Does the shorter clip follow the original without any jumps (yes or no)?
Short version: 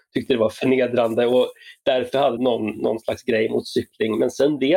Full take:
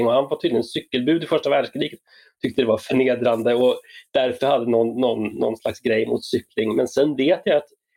no